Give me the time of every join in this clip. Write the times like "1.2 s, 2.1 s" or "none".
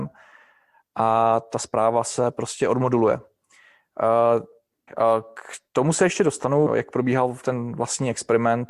4.9 s, 6.7 s